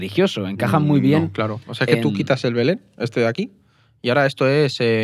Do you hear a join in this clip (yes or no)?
no